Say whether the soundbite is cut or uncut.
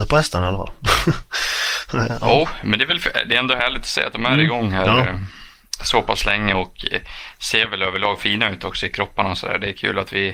uncut